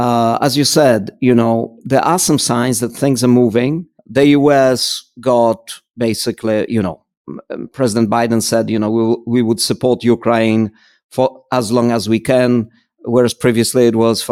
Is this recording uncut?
no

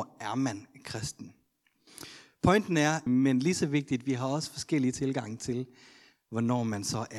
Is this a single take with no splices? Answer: no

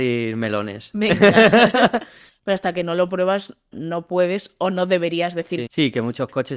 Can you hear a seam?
yes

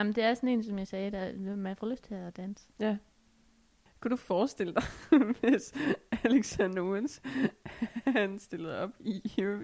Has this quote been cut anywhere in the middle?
no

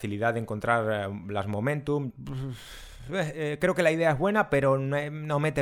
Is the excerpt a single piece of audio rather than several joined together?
no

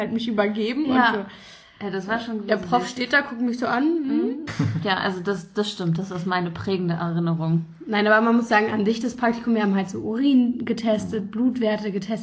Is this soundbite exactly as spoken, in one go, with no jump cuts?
no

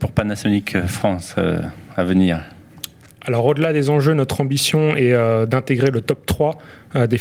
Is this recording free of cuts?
yes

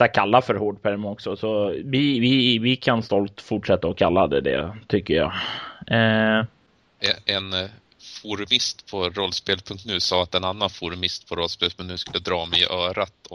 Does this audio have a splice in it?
no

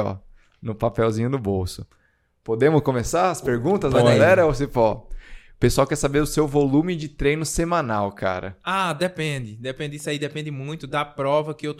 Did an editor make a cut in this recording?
no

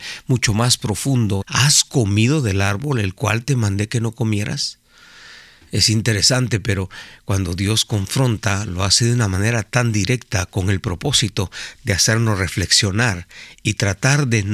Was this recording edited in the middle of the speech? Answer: yes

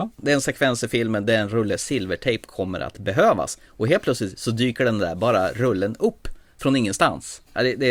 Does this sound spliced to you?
no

